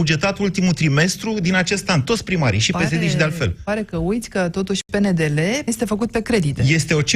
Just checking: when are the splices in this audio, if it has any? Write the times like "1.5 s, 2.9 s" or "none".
5.7 s